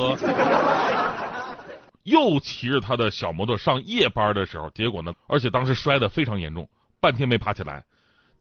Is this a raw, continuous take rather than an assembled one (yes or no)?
no